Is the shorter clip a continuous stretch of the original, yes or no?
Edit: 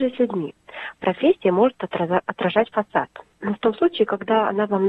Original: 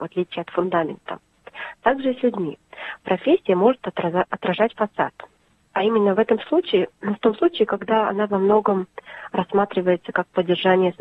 no